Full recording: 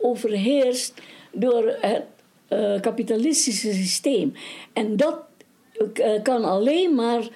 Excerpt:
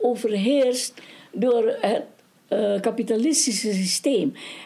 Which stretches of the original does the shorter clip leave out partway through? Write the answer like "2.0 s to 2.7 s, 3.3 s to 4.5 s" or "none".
none